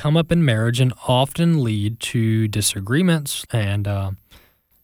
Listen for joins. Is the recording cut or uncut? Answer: cut